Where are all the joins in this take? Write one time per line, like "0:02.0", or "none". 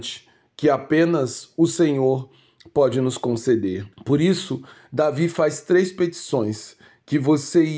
0:03.9